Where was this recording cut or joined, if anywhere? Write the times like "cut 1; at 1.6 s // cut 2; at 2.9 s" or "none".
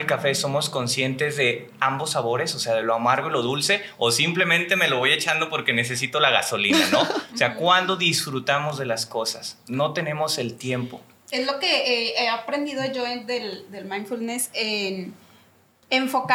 none